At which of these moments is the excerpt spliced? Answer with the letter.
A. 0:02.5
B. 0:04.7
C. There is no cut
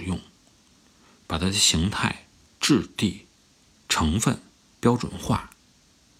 A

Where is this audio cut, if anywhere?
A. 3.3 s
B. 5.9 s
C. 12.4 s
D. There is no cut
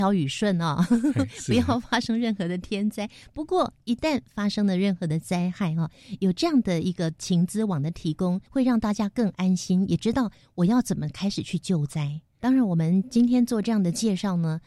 C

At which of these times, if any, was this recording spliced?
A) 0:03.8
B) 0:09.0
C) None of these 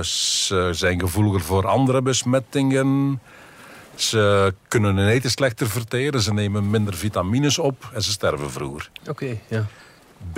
B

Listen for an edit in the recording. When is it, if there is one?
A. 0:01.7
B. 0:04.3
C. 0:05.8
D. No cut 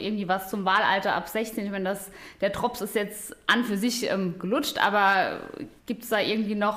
C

